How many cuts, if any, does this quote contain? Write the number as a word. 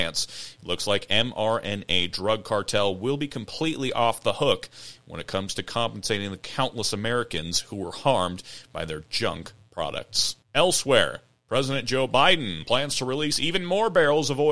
two